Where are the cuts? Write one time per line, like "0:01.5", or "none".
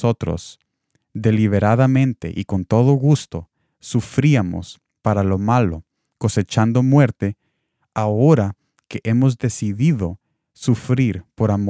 none